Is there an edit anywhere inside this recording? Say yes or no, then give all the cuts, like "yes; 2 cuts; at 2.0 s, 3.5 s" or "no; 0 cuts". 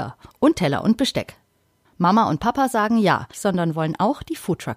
yes; 2 cuts; at 1.9 s, 3.3 s